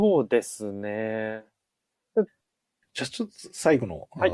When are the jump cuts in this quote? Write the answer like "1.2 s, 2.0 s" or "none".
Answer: 2.3 s